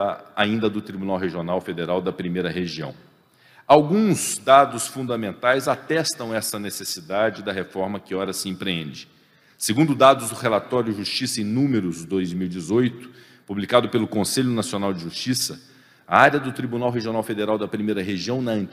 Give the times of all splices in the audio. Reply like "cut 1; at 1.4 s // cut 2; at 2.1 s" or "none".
none